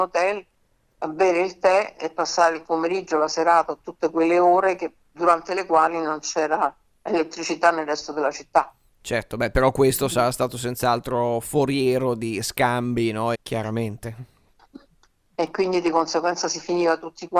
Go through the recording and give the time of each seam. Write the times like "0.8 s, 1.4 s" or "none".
13.3 s